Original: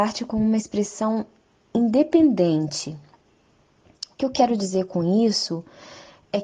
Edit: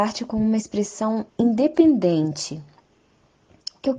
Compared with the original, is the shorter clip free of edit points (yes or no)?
no